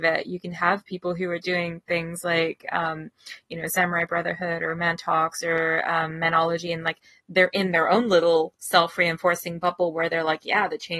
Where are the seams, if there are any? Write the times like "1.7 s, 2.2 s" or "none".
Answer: none